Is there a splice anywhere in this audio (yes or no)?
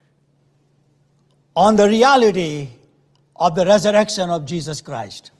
no